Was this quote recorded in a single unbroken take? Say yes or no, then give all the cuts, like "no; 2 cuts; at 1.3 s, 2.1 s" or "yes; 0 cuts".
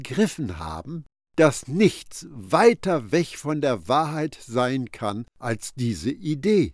no; 1 cut; at 1.3 s